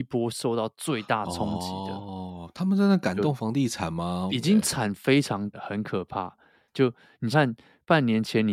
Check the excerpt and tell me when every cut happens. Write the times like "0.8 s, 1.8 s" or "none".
4.3 s, 5.5 s, 7.3 s